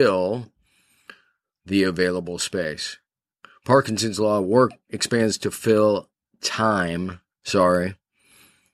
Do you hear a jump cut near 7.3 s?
no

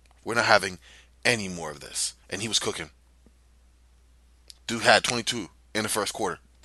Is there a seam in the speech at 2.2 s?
yes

